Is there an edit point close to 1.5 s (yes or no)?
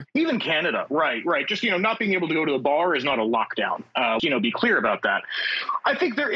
no